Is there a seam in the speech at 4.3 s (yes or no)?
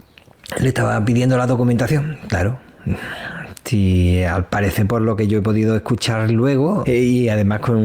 no